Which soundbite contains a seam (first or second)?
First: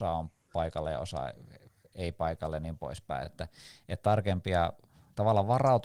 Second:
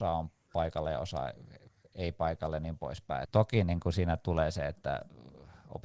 second